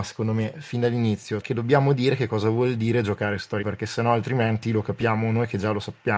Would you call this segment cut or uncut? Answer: cut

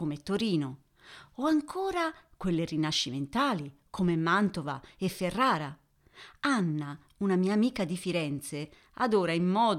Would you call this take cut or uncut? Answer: uncut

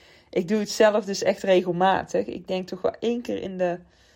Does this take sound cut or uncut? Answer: uncut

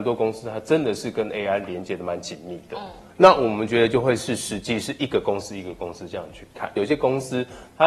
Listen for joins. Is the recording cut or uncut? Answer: cut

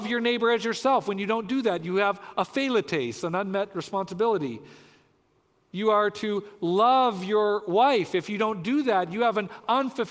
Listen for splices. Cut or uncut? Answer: uncut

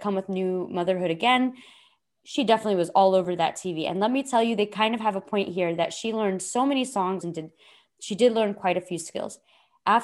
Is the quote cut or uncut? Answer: cut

